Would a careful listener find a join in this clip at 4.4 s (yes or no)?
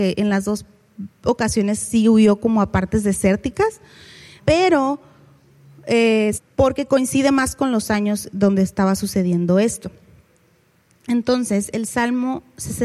yes